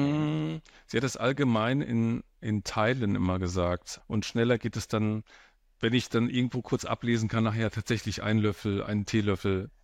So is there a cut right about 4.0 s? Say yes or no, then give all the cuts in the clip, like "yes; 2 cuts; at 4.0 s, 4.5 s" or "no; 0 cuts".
yes; 1 cut; at 4.0 s